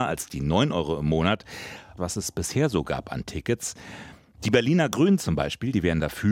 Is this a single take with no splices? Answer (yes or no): no